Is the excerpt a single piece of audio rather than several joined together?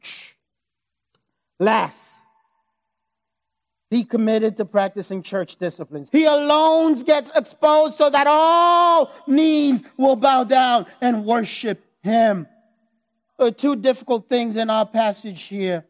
no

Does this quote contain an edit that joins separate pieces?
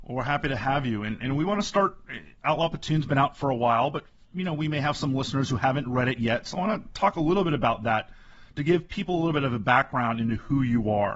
no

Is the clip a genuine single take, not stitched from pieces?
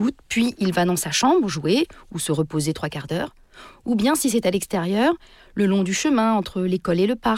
yes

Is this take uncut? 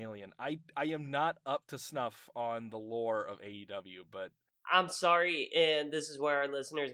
yes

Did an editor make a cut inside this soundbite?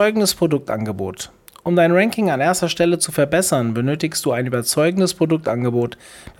no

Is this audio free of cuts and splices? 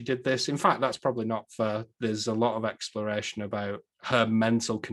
yes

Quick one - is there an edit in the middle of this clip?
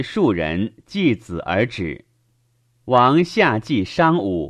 yes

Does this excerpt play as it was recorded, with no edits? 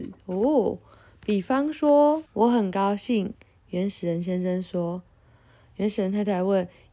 no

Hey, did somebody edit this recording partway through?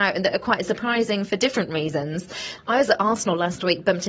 yes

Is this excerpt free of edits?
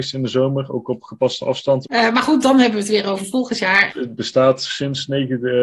no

